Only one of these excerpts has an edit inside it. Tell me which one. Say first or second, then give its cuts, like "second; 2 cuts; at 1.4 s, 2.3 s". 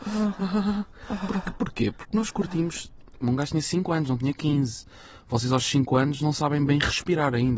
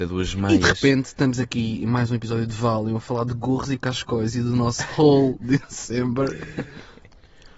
first; 1 cut; at 3.2 s